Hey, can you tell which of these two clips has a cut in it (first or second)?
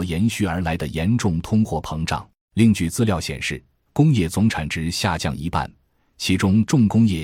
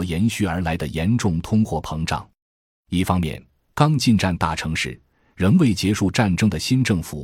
first